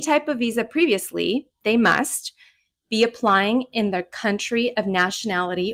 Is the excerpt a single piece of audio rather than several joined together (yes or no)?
yes